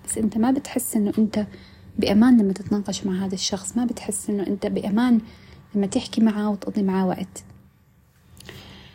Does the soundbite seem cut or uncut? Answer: uncut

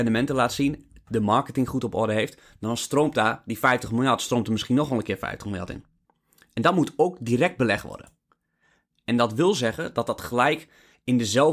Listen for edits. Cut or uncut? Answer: uncut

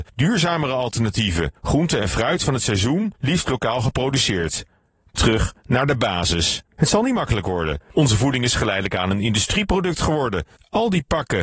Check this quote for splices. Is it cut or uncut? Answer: cut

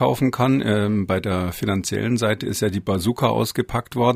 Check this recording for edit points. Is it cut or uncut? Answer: uncut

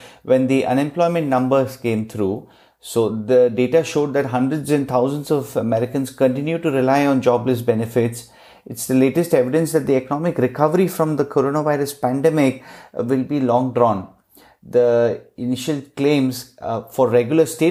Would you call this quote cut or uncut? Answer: uncut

